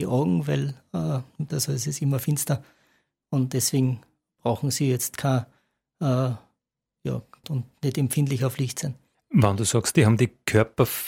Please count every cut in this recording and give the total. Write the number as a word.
three